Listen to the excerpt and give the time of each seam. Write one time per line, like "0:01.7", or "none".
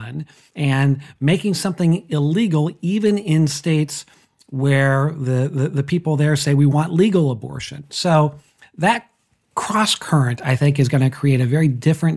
none